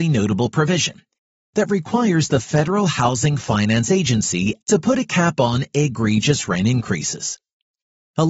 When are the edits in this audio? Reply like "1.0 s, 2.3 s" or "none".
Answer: 4.6 s